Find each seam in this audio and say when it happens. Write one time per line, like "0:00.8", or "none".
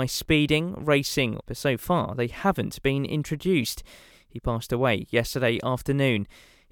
0:01.4
0:04.1